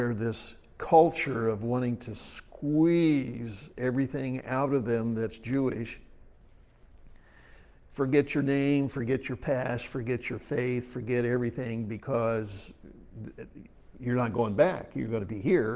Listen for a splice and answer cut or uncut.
uncut